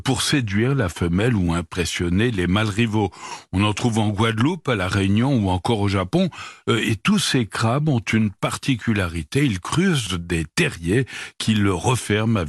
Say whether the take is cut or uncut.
uncut